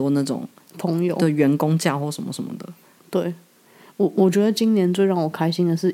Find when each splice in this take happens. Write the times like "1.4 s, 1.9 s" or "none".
none